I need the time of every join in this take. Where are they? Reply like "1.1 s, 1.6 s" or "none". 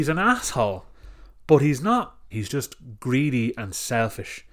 2.3 s